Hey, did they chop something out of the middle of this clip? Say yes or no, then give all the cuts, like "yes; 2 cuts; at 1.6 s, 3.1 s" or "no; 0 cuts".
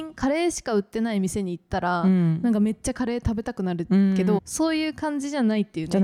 yes; 1 cut; at 4.4 s